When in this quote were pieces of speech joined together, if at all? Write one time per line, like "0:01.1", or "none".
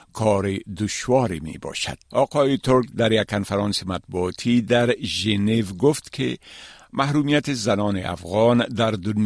0:02.1